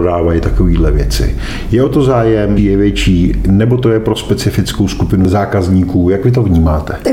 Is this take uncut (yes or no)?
no